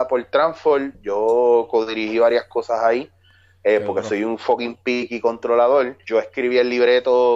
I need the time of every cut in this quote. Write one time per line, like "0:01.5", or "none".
0:06.0

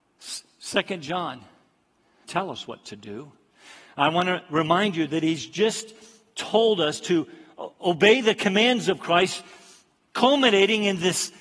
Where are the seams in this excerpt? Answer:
0:02.2

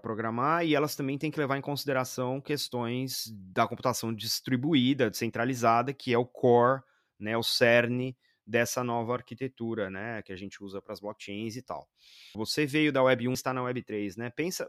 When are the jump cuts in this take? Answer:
0:12.3
0:13.3

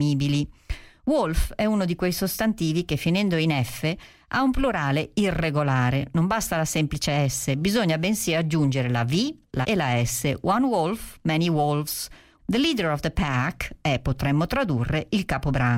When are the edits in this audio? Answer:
0:09.6
0:12.4

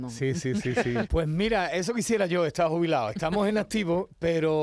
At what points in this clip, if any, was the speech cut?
0:01.1

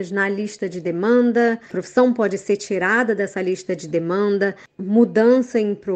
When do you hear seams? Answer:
none

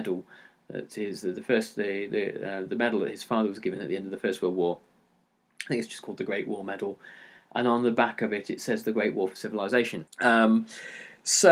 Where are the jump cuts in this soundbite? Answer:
0:10.1

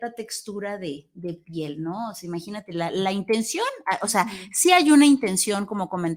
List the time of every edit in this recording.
none

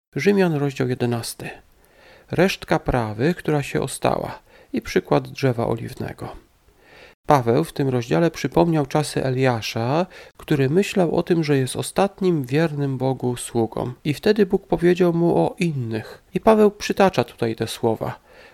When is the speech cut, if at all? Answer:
0:14.0
0:16.3

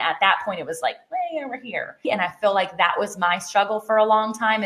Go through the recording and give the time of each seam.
0:02.0

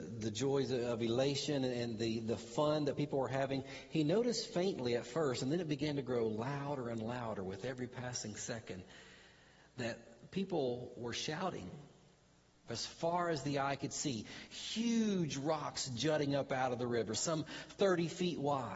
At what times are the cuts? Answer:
0:12.7
0:17.1

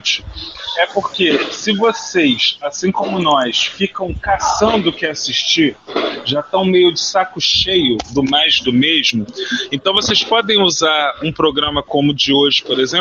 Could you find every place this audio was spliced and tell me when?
none

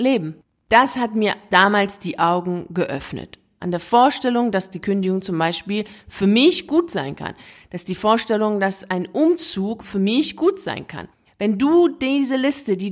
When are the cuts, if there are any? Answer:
0:03.6
0:11.2

